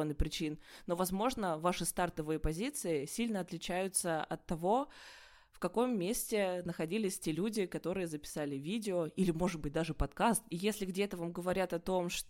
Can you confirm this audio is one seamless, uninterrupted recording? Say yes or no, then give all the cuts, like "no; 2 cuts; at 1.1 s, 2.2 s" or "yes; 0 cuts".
no; 1 cut; at 10.5 s